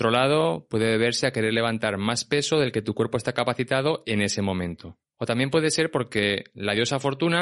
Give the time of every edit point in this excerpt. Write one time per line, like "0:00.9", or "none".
0:05.1